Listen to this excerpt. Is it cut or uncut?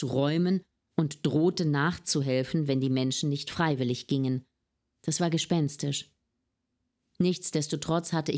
uncut